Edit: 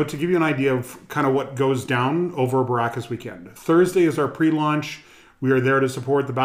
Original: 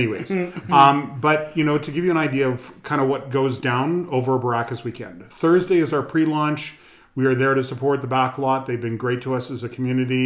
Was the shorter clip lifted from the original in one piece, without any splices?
yes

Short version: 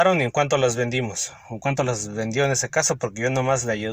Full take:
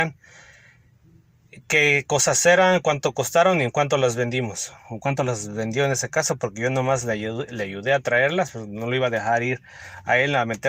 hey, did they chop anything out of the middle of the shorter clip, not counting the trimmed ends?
no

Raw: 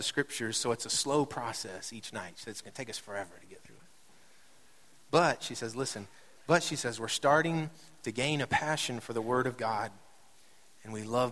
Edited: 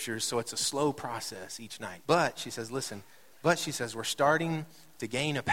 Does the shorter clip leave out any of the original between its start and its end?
yes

